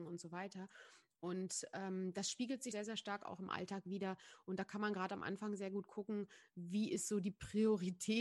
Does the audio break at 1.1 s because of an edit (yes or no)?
no